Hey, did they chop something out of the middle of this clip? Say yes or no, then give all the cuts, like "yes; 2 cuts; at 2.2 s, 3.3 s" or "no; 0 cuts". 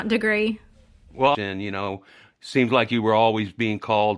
yes; 1 cut; at 1.3 s